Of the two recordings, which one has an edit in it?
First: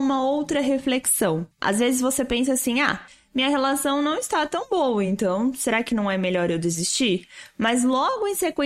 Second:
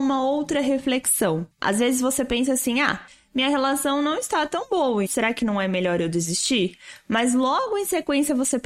second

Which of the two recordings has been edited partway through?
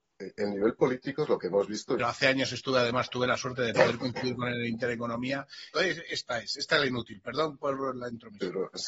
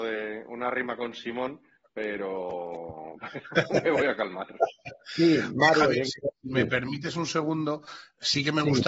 first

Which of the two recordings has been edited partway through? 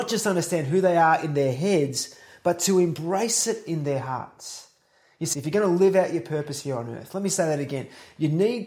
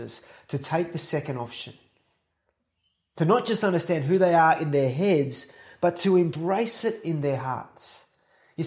first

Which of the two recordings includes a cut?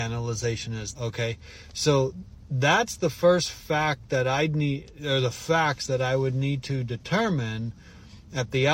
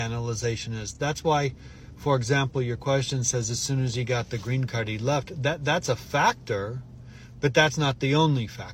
first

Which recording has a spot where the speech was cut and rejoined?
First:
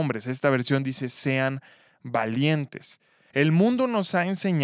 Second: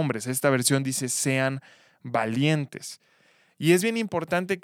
first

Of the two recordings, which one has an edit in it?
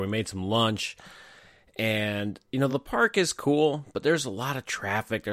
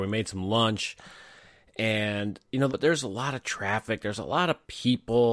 second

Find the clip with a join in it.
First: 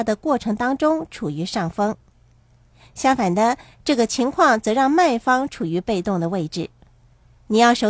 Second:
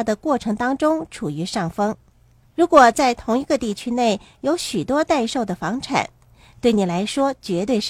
second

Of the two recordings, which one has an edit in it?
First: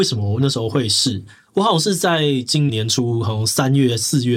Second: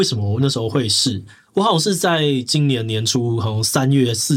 first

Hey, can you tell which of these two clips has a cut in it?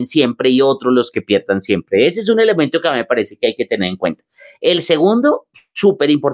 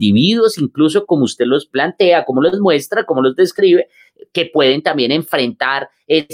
second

